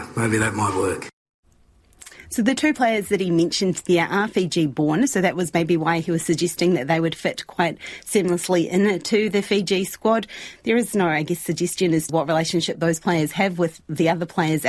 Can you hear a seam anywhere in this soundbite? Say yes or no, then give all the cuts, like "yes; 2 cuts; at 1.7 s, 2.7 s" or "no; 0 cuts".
yes; 1 cut; at 12.1 s